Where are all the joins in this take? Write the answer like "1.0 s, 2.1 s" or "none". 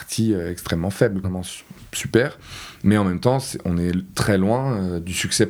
1.2 s